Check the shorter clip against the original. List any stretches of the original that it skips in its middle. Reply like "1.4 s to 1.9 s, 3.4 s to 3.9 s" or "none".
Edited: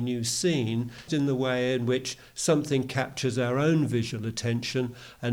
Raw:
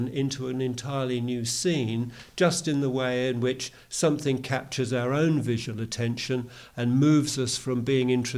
2.3 s to 2.6 s